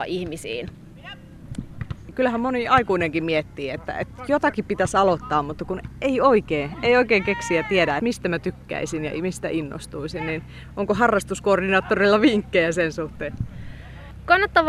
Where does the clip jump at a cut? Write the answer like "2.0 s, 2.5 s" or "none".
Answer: 8.0 s